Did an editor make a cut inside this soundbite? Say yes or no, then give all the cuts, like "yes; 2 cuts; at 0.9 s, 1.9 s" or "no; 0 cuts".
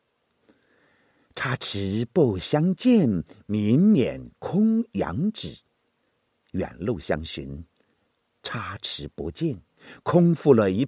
no; 0 cuts